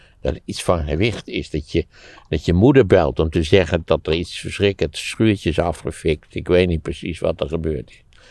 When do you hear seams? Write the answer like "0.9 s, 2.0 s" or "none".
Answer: 3.8 s